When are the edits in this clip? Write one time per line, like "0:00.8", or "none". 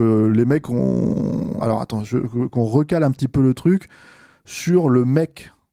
0:01.6